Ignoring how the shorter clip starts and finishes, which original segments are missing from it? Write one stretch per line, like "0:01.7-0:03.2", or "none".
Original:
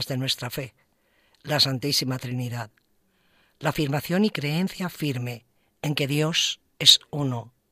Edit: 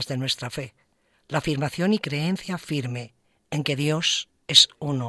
0:01.1-0:03.4